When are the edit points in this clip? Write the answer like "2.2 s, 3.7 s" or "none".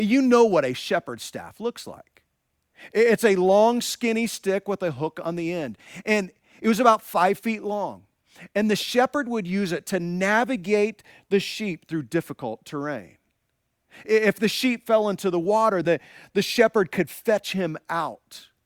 15.8 s